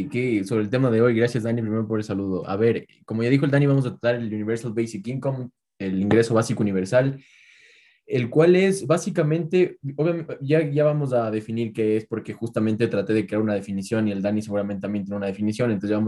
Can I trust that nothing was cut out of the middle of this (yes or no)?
yes